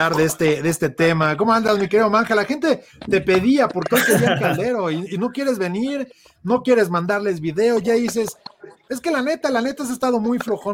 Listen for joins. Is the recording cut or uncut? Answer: uncut